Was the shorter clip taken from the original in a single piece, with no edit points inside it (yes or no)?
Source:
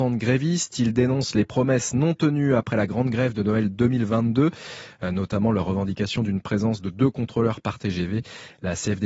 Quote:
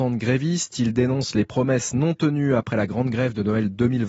yes